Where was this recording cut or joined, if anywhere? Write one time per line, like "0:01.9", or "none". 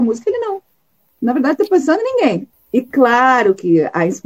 0:02.5